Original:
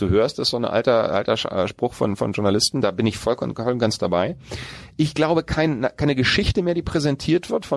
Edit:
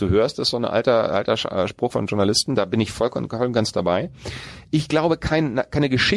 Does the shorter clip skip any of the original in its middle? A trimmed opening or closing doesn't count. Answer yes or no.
yes